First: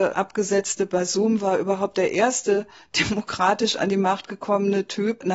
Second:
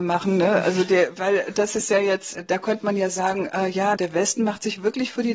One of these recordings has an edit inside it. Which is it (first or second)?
second